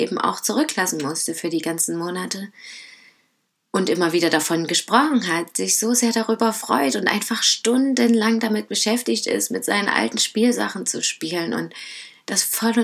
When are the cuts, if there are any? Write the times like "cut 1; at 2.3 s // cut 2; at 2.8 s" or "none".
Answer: none